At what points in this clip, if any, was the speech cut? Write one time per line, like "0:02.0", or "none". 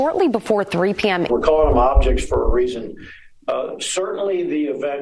0:01.3